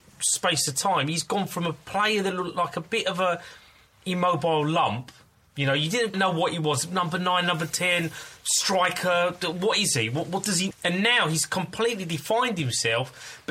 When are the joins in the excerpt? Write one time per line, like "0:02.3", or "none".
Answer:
0:06.1
0:10.7